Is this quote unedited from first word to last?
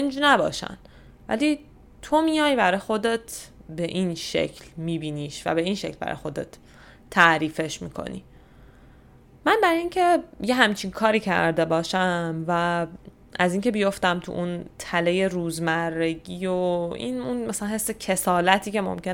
yes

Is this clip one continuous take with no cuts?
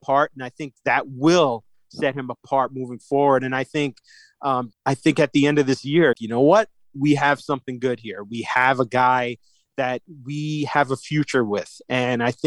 no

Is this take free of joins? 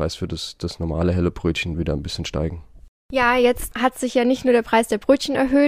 yes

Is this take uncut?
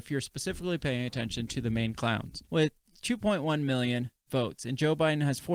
no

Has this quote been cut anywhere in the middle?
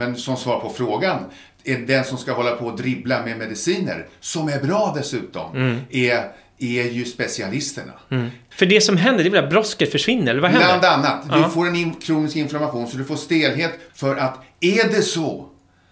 yes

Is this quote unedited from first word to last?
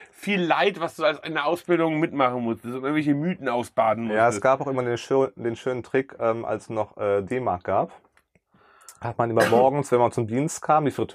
yes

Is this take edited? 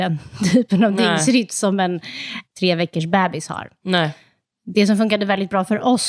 yes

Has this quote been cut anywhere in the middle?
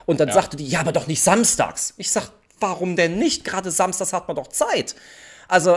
no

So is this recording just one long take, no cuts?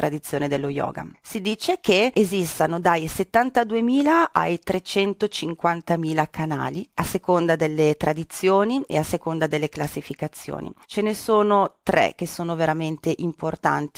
no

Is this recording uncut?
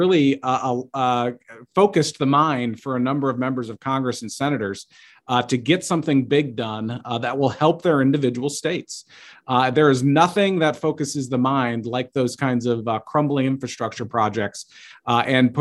yes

